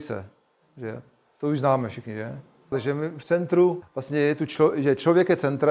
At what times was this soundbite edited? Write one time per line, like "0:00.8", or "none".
0:02.7
0:03.8